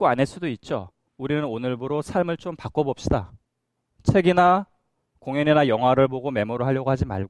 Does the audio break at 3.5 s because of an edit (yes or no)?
no